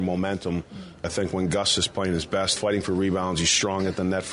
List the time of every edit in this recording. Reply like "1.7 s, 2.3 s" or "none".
1.0 s, 2.6 s